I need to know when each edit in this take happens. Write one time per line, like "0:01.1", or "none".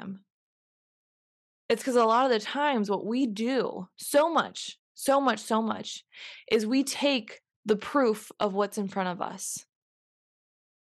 none